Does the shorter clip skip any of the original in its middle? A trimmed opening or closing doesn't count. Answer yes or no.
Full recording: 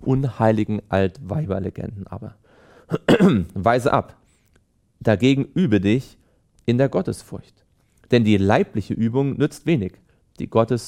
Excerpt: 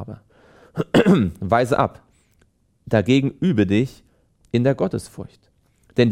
no